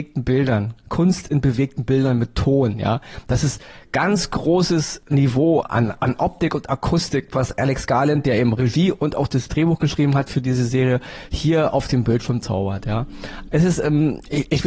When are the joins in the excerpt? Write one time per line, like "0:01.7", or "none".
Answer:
0:05.6
0:13.5